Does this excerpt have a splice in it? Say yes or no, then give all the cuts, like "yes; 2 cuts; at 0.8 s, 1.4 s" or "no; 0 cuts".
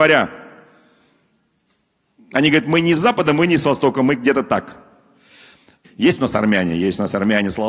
yes; 1 cut; at 5.8 s